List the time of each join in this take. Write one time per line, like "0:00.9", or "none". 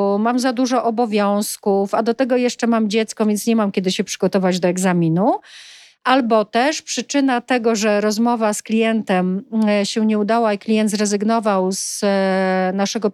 none